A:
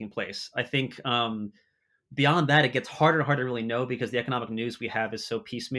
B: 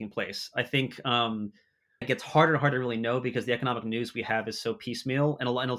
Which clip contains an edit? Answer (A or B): B